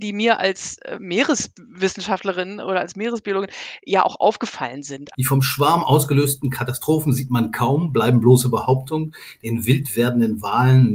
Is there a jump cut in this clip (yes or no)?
yes